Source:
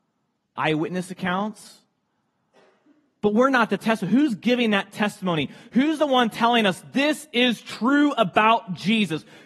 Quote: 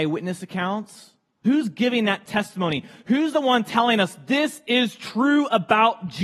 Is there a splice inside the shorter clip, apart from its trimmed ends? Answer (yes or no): yes